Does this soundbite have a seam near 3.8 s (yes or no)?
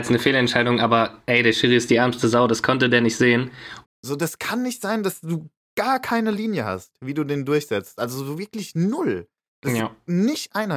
yes